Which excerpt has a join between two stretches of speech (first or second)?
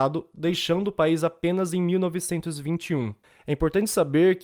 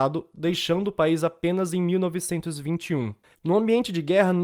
second